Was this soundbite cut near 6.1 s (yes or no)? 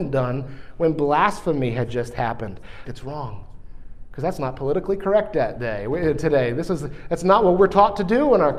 no